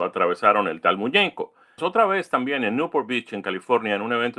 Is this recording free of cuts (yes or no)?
no